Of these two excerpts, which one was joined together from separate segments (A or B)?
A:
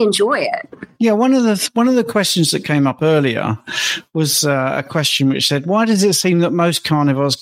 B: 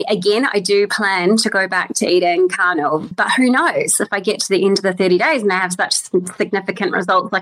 B